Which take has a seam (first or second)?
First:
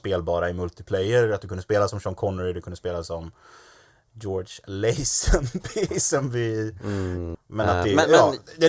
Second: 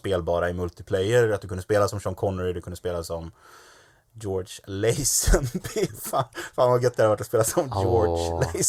first